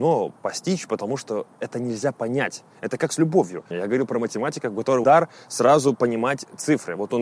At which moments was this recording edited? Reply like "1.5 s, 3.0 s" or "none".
3.7 s, 5.0 s